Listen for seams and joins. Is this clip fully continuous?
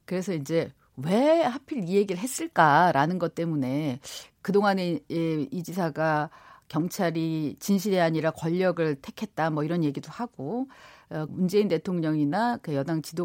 no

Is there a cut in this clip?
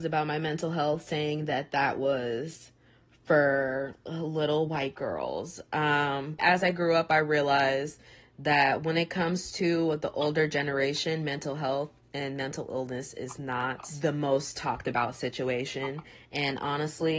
yes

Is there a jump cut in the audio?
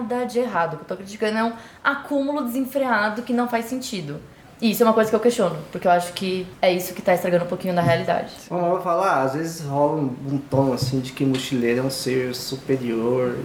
no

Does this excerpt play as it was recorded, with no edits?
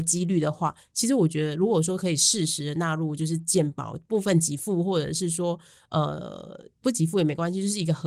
yes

